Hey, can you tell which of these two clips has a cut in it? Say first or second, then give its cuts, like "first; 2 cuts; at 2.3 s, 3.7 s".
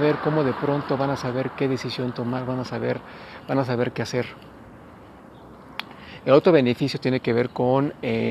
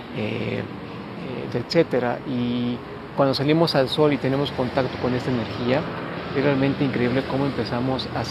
second; 1 cut; at 1.5 s